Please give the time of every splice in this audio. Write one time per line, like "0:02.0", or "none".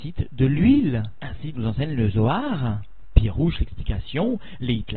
0:01.5